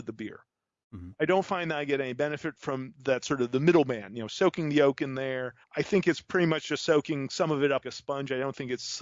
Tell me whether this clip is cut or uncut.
cut